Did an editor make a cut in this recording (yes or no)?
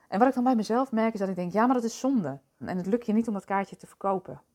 yes